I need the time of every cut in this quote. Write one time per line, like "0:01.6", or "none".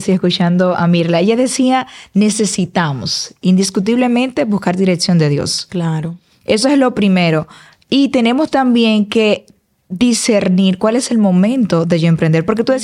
none